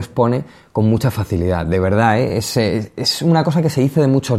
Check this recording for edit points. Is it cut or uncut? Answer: uncut